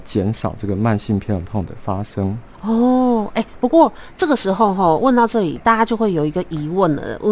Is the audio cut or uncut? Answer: uncut